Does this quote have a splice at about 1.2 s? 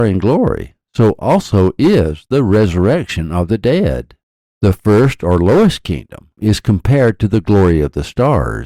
no; 2 cuts; at 4.5 s, 6.4 s

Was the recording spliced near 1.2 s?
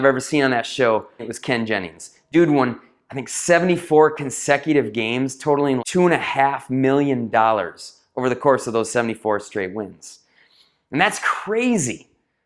yes; 2 cuts; at 1.2 s, 5.8 s

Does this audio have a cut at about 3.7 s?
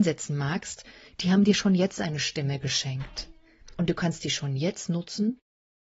no; 0 cuts

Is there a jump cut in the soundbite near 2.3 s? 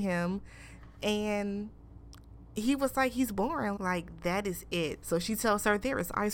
no; 2 cuts; at 3.8 s, 5.0 s

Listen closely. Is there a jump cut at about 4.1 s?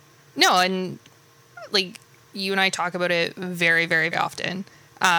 yes; 1 cut; at 4.1 s

